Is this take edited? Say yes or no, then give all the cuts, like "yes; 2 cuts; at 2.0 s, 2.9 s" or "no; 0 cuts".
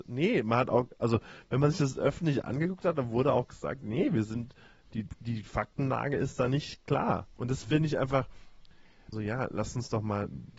yes; 2 cuts; at 7.4 s, 9.1 s